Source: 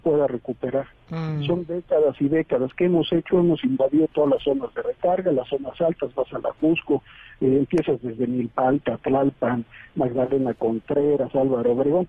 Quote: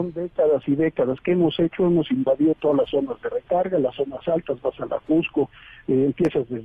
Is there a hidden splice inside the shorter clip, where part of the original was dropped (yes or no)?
no